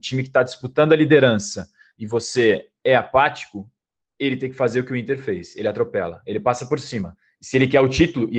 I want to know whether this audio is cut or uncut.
uncut